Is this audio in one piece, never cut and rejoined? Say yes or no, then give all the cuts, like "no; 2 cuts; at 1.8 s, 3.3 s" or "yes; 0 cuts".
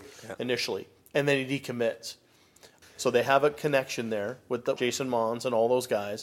no; 2 cuts; at 2.8 s, 4.8 s